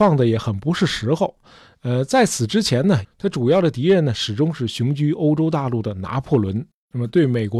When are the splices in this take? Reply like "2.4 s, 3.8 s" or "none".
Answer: 3.0 s